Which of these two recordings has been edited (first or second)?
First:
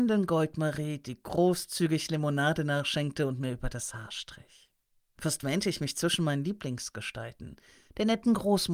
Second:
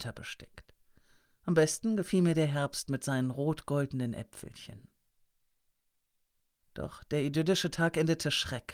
first